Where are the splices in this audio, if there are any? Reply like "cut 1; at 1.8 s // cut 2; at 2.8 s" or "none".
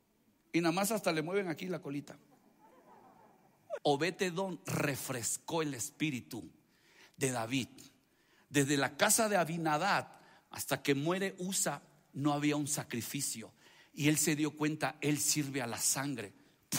cut 1; at 3.8 s